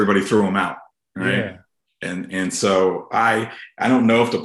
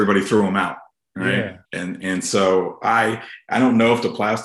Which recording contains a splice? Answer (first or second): second